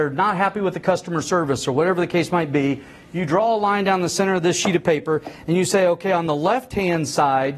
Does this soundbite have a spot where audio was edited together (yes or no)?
no